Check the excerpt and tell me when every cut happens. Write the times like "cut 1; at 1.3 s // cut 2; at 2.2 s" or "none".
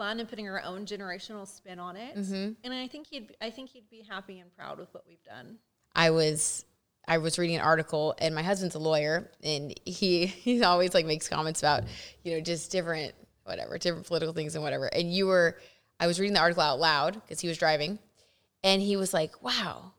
cut 1; at 5.8 s